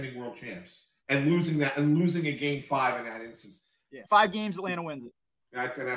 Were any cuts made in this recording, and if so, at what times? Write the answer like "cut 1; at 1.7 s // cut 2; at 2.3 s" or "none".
cut 1; at 1.0 s // cut 2; at 4.0 s